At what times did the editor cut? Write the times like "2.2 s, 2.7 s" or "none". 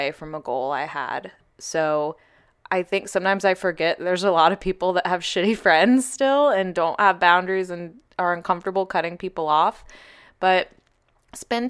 none